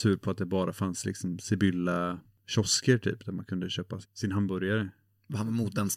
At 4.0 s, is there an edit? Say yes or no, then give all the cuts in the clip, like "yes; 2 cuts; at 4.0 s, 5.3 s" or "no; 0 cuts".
yes; 1 cut; at 4.0 s